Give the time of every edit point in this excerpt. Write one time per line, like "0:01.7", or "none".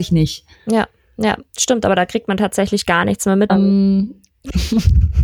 0:03.5